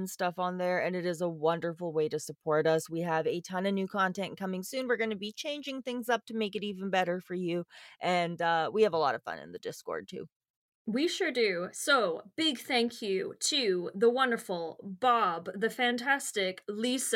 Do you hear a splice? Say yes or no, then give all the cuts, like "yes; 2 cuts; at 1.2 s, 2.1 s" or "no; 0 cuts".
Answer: no; 0 cuts